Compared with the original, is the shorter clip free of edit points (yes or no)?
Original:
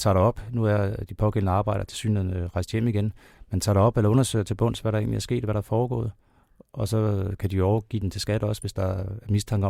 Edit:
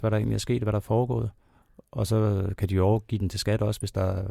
yes